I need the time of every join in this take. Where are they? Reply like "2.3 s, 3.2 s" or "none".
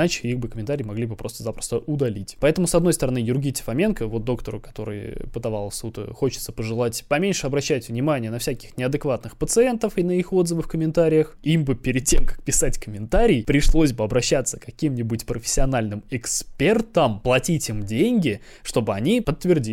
11.4 s